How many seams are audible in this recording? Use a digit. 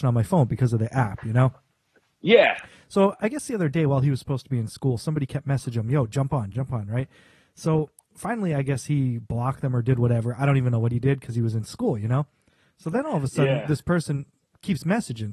1